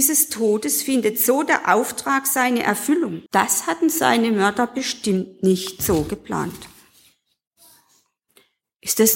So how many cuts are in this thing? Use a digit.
1